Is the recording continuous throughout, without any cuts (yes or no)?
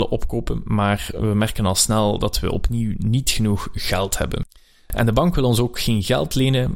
yes